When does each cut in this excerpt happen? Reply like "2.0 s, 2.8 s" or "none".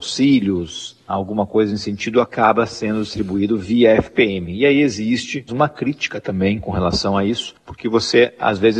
5.5 s